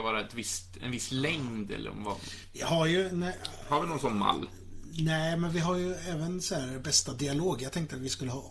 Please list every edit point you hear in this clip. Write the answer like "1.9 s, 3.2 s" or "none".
none